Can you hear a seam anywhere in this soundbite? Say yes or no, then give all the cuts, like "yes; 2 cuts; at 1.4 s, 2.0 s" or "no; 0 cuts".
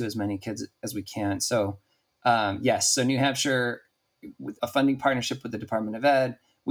yes; 1 cut; at 4.6 s